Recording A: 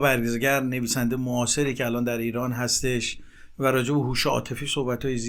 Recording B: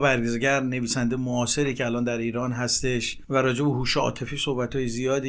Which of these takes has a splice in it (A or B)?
B